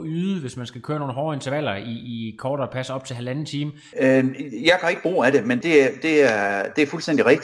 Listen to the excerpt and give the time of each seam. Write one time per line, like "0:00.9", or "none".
0:03.9
0:05.6